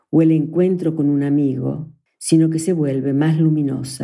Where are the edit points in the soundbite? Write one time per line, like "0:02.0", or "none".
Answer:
0:02.1